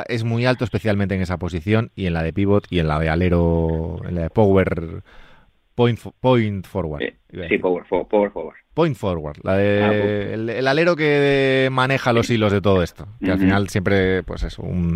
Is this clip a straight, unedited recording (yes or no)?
yes